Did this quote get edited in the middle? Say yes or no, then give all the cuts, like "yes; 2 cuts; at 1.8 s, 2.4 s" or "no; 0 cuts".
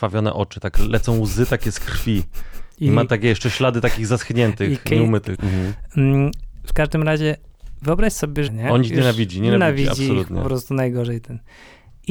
yes; 2 cuts; at 5.3 s, 8.5 s